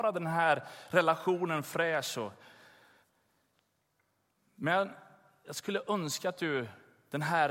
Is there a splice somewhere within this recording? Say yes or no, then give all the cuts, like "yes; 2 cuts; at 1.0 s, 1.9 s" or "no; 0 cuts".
no; 0 cuts